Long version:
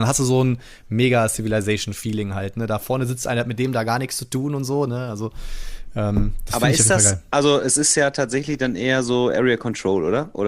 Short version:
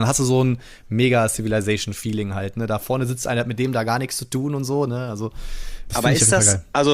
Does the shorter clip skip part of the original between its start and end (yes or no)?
yes